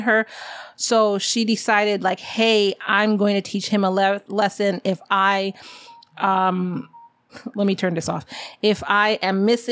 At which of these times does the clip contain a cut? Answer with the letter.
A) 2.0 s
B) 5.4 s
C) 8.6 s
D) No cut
D